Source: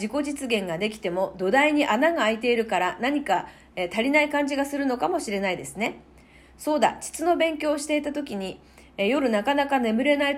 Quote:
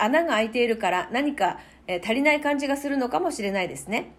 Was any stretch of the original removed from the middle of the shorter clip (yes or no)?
no